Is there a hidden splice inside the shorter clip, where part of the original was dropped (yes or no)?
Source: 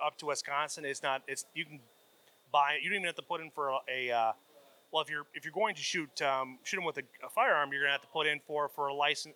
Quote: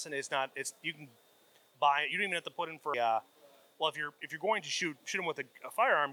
yes